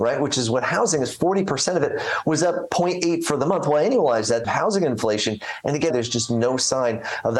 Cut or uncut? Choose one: cut